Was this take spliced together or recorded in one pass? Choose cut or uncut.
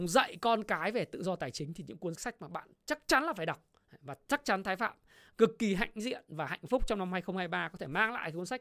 cut